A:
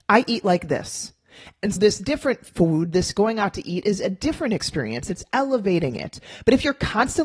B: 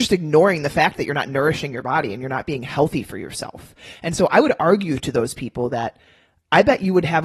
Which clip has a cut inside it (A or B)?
A